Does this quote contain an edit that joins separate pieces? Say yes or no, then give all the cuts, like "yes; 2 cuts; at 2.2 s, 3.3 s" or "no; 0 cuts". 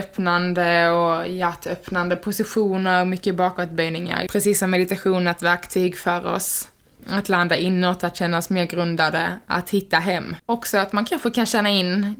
yes; 2 cuts; at 4.3 s, 10.4 s